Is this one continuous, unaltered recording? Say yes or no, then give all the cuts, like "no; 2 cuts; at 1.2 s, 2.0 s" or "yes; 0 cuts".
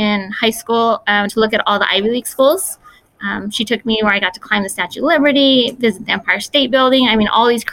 no; 1 cut; at 1.3 s